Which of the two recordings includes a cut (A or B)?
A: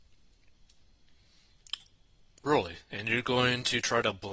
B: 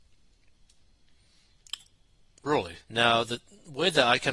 B